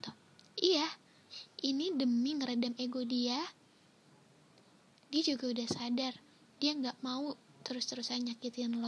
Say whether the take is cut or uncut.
uncut